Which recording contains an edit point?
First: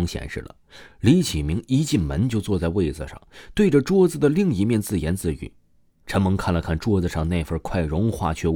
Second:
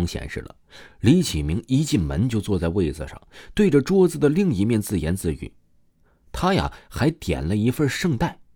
first; 1 cut; at 6.1 s

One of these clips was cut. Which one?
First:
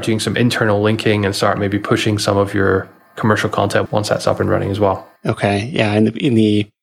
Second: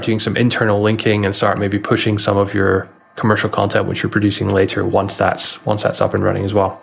first; 2 cuts; at 3.9 s, 5.2 s

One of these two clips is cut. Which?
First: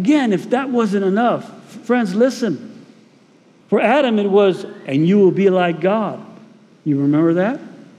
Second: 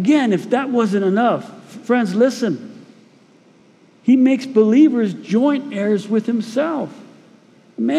first; 2 cuts; at 3.6 s, 6.7 s

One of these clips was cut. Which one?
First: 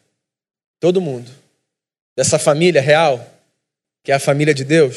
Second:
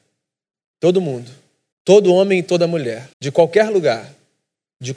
second; 2 cuts; at 1.7 s, 3.1 s

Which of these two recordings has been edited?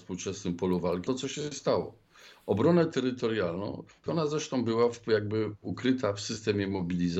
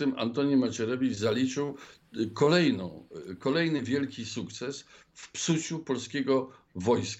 first; 2 cuts; at 1.1 s, 4.1 s

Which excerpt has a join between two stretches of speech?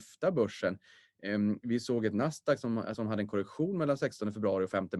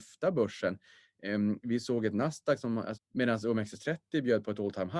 second; 1 cut; at 2.9 s

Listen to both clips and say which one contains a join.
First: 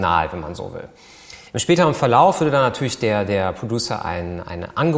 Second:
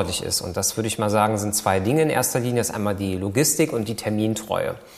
first; 1 cut; at 1.5 s

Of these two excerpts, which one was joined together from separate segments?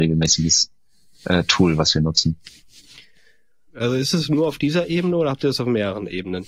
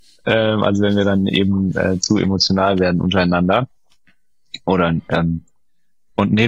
first; 1 cut; at 3.7 s

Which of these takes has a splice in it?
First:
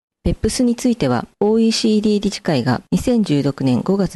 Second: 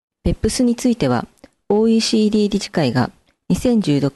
first; 2 cuts; at 1.3 s, 2.9 s

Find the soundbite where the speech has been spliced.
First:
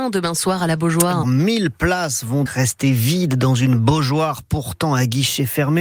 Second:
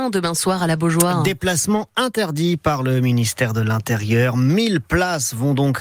first; 2 cuts; at 1.2 s, 2.5 s

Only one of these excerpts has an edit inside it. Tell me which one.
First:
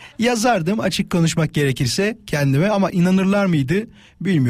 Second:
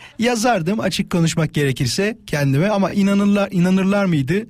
first; 1 cut; at 2.9 s

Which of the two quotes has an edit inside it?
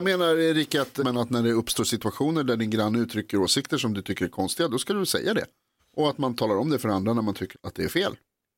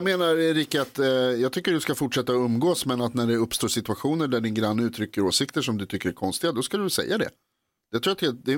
first; 3 cuts; at 1.0 s, 5.8 s, 7.5 s

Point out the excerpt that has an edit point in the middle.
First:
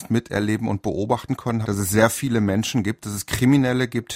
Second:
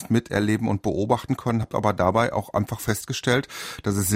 first; 1 cut; at 1.6 s

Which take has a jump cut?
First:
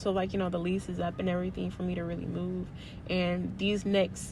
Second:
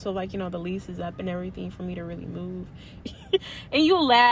second; 1 cut; at 3.0 s

